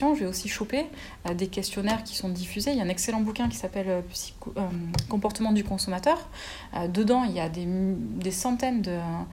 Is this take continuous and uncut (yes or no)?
yes